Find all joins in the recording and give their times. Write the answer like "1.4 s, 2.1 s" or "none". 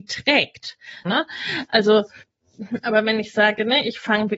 1.0 s